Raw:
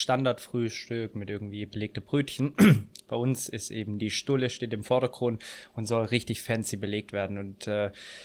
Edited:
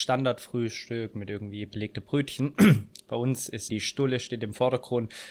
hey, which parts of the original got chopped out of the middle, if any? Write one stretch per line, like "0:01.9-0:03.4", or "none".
0:03.7-0:04.0